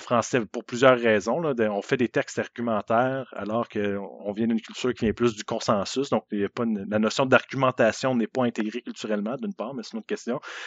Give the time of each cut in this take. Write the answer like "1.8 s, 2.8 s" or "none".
none